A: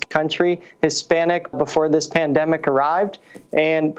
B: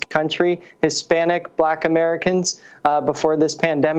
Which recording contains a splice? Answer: A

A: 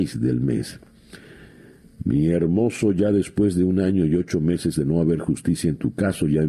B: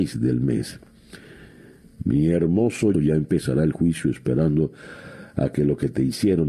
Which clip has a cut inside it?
B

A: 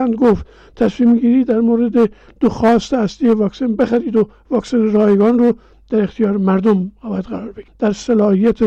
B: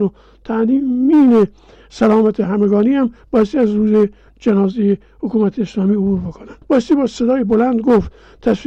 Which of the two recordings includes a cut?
B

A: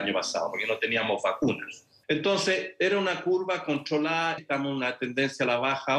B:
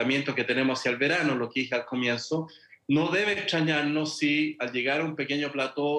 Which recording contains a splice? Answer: A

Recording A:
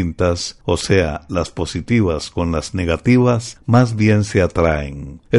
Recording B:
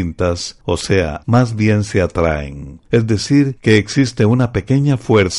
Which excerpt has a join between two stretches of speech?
B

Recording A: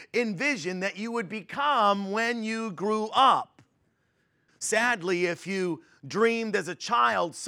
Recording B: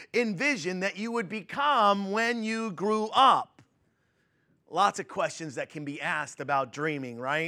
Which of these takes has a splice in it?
A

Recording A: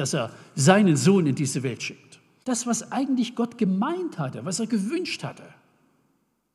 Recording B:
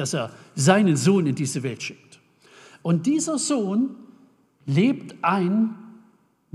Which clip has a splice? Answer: A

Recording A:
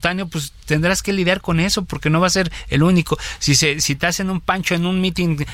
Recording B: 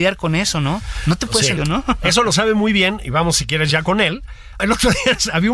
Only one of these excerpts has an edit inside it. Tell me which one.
B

